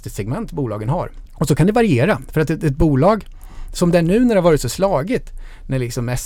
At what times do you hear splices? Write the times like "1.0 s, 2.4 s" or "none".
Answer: none